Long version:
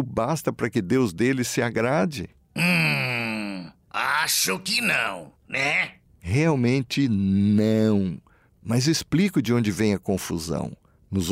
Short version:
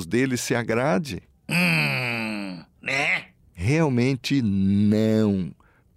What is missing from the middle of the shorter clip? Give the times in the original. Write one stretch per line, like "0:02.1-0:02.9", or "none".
0:03.8-0:05.4